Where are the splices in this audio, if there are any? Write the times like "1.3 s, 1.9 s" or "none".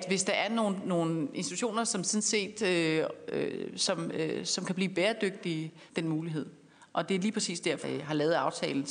5.9 s, 7.8 s